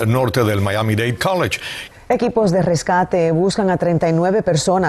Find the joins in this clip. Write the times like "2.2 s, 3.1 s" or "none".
1.9 s